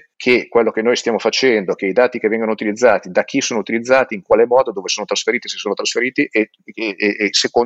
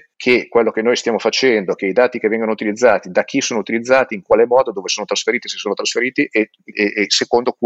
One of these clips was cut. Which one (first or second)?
second